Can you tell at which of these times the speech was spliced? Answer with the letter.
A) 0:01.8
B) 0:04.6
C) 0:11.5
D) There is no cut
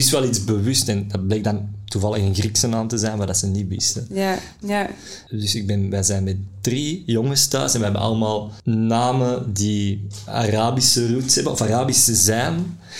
B